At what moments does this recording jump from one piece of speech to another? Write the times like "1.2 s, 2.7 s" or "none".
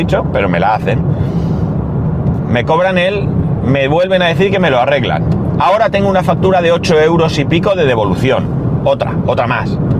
2.4 s